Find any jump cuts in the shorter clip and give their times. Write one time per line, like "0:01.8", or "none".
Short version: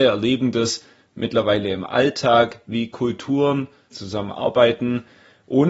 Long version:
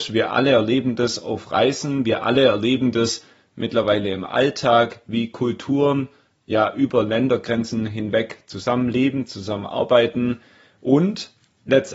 0:03.9